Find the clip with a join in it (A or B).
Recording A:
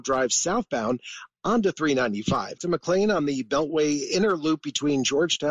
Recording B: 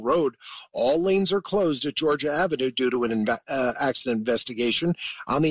A